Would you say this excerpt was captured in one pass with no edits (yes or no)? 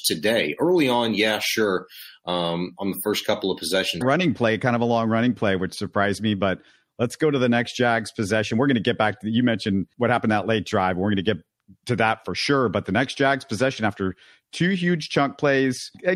no